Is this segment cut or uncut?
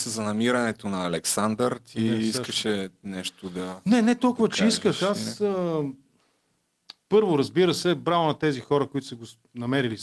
uncut